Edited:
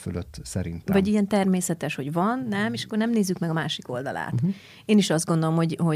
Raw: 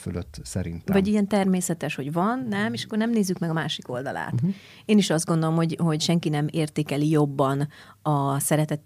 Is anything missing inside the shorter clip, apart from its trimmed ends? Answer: no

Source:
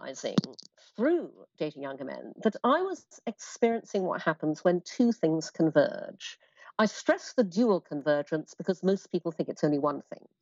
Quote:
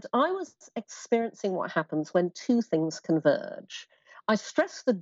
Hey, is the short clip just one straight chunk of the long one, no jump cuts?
yes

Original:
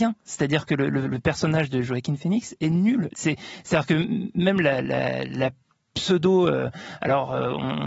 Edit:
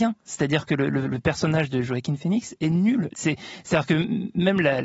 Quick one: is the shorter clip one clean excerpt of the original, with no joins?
yes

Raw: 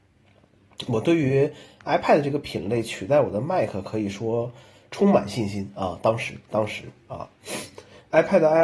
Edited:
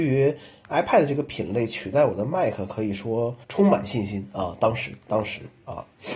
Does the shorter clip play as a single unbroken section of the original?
no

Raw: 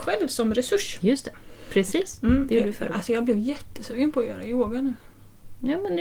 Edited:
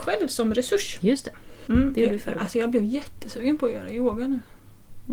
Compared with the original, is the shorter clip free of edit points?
no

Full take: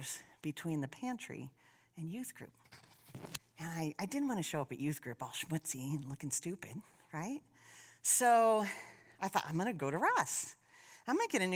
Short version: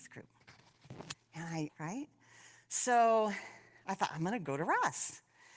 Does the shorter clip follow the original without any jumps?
no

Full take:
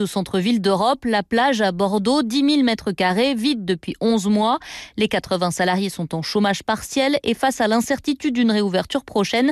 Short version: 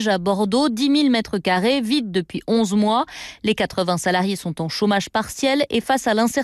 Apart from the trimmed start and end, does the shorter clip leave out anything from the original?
no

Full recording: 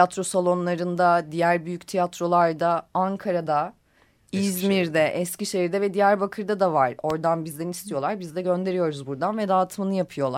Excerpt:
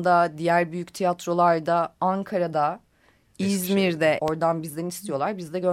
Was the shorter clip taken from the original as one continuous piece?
no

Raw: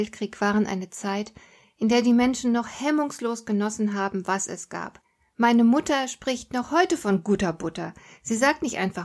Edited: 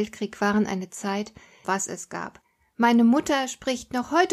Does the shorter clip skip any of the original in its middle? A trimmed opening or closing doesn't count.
yes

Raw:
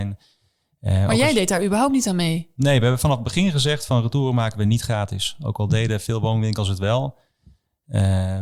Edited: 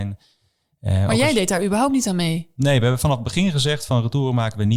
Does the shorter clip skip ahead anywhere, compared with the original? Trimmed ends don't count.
no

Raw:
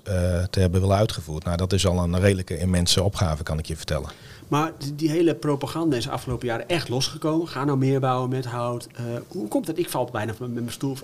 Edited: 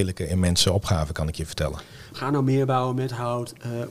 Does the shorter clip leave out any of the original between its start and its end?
yes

